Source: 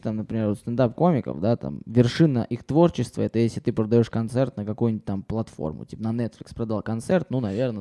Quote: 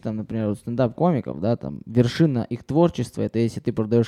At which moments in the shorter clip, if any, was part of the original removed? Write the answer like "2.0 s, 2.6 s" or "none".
none